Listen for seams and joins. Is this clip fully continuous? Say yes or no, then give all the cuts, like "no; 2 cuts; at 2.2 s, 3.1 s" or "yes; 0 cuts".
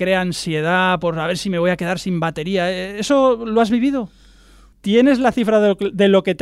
no; 1 cut; at 4.7 s